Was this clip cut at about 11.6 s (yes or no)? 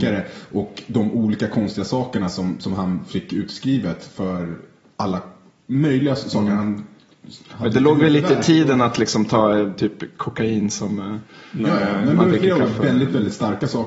no